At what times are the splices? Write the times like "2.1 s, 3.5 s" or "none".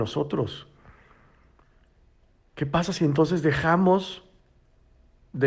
none